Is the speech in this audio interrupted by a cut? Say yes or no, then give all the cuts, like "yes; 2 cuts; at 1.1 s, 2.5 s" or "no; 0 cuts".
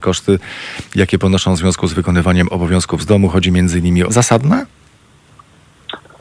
yes; 1 cut; at 4.1 s